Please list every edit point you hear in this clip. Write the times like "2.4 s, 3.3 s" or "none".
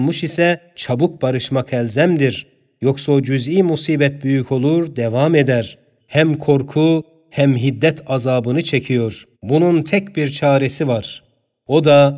6.0 s, 9.4 s